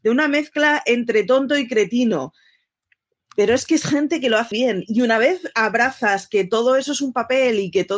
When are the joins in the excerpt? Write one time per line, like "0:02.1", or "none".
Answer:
0:04.5